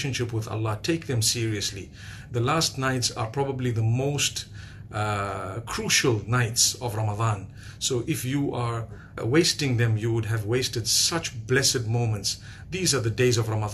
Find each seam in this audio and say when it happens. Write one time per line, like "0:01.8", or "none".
0:09.2
0:12.6